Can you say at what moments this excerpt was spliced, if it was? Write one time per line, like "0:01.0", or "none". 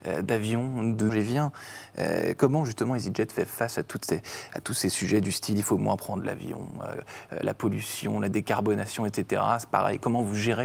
0:01.1